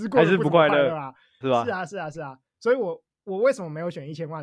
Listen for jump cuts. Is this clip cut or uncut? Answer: uncut